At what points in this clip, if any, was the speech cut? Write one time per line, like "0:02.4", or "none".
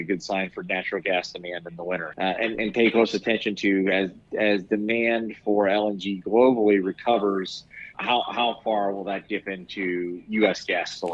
0:02.1
0:07.9